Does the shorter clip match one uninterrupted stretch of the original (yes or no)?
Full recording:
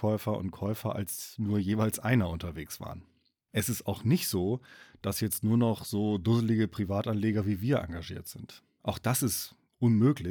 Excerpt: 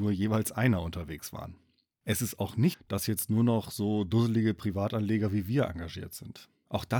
no